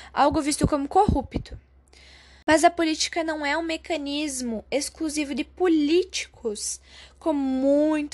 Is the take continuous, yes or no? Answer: yes